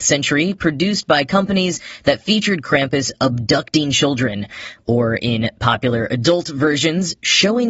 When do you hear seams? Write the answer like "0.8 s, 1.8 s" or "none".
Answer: none